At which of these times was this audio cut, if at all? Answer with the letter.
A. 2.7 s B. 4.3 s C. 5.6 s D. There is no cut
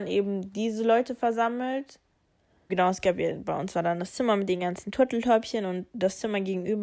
A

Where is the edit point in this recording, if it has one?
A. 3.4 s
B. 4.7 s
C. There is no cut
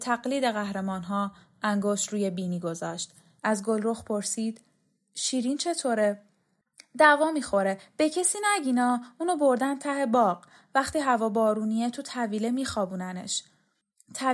A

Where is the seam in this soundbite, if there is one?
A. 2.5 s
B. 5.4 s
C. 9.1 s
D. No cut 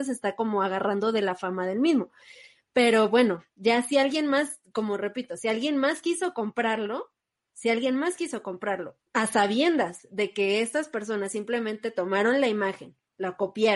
C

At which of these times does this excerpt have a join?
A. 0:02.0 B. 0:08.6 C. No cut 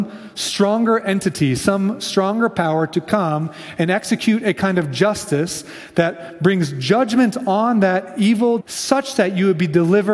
B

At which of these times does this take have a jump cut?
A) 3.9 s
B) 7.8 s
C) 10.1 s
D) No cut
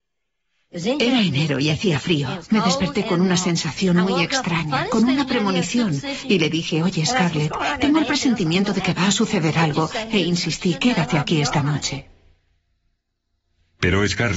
D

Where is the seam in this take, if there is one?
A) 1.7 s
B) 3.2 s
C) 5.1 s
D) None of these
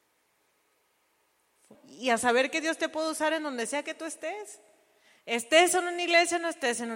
A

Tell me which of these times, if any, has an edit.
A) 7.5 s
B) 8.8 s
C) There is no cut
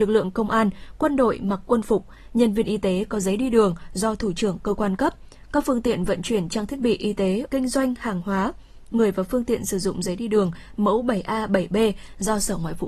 A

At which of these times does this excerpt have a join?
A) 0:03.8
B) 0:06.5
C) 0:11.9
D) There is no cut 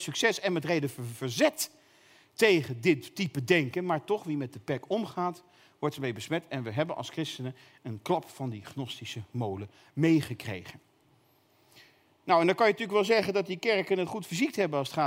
D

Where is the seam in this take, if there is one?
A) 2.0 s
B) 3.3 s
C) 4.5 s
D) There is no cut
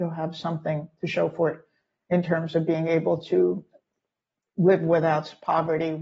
D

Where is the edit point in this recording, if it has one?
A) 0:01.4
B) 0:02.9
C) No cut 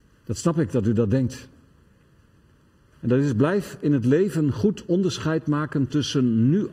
B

